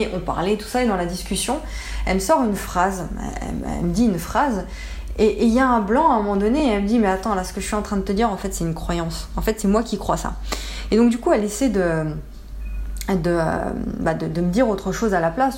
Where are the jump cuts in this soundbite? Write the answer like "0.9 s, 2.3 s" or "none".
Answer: none